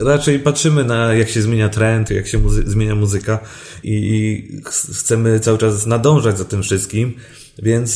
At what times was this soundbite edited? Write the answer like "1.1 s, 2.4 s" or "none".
2.1 s, 3.8 s